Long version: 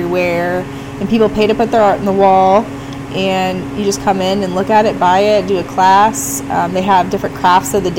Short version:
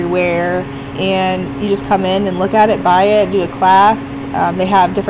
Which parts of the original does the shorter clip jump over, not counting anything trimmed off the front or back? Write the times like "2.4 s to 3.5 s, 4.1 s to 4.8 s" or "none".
0.9 s to 3.1 s